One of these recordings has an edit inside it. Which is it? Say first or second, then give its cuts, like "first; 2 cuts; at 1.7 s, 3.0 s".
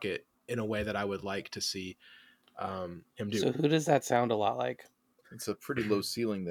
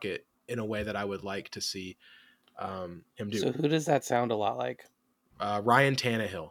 first; 1 cut; at 5.2 s